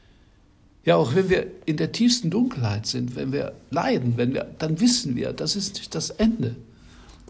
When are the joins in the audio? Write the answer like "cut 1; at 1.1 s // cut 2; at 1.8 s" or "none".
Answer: none